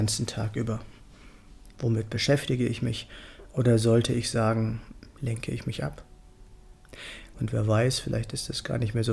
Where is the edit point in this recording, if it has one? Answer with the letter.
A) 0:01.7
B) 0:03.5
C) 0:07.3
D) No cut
C